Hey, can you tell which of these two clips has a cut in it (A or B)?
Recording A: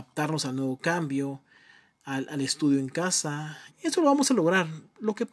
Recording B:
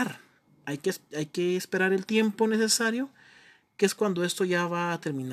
A